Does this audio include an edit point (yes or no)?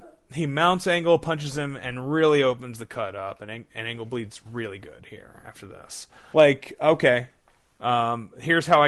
yes